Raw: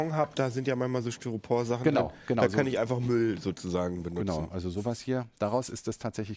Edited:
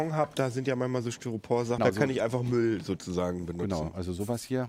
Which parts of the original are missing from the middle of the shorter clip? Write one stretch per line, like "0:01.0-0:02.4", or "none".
0:01.8-0:02.4